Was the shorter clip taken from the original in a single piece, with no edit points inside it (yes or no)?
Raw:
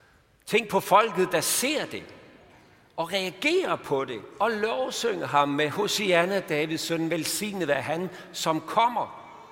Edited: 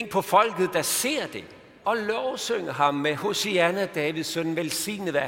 no